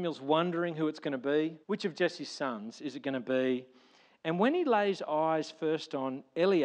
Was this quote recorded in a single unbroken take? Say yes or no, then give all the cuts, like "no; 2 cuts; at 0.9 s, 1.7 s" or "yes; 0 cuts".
no; 1 cut; at 1.6 s